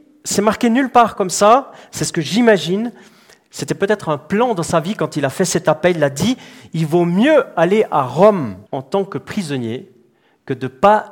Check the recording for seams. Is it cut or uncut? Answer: cut